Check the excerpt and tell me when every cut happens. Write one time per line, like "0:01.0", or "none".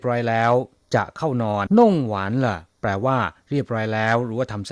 0:01.7